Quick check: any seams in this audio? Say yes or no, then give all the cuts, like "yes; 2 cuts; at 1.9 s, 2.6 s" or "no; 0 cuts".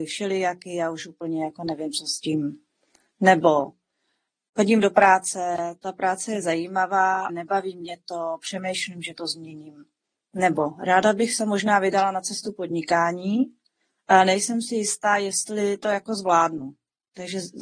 yes; 1 cut; at 7.3 s